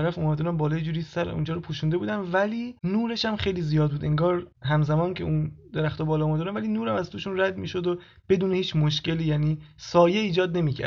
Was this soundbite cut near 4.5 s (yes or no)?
yes